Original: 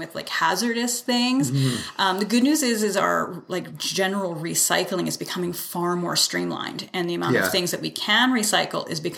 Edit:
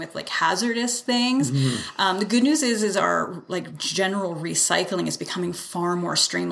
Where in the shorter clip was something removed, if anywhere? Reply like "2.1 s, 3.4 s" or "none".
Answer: none